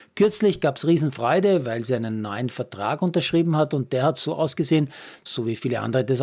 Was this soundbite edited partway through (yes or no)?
yes